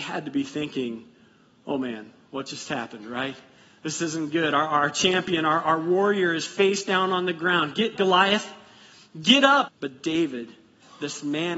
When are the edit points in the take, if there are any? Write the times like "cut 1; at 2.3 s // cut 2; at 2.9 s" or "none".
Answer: cut 1; at 8.0 s // cut 2; at 9.7 s